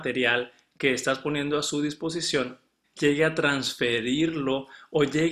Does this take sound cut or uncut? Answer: cut